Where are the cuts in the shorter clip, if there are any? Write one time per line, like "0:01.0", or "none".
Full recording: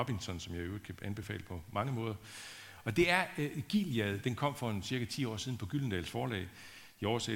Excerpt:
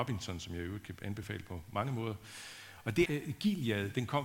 0:03.0